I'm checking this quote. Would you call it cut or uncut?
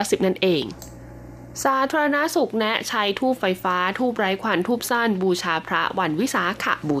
uncut